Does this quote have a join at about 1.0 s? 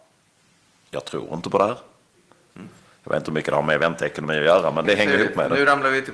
no; 2 cuts; at 2.5 s, 4.8 s

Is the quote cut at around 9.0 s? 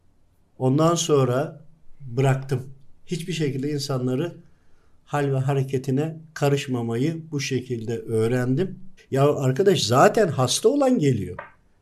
yes; 1 cut; at 9.0 s

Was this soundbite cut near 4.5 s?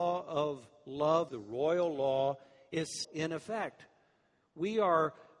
no; 2 cuts; at 1.3 s, 3.0 s

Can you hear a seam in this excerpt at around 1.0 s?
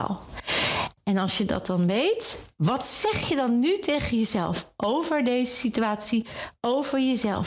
no; 0 cuts

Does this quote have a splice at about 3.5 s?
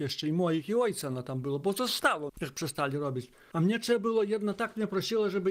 no; 1 cut; at 2.3 s

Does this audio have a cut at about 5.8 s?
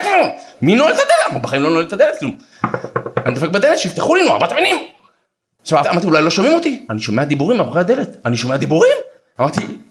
yes; 2 cuts; at 5.8 s, 6.9 s

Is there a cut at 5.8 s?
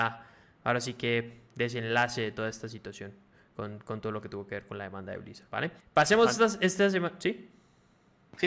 yes; 1 cut; at 5.8 s

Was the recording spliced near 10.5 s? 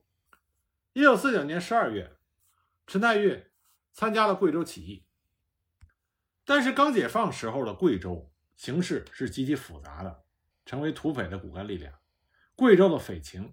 yes; 1 cut; at 10.5 s

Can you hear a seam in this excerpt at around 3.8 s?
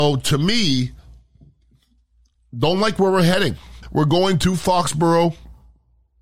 yes; 1 cut; at 3.8 s

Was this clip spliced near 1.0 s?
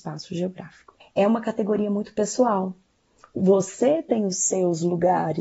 yes; 1 cut; at 1.0 s

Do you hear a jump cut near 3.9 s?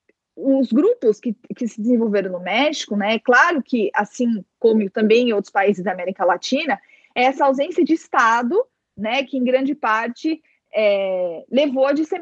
no; 0 cuts

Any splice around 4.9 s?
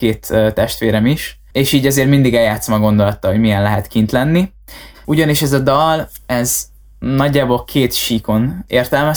yes; 1 cut; at 4.9 s

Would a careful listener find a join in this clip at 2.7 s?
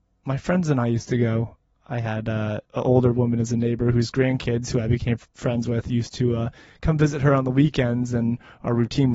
yes; 1 cut; at 2.7 s

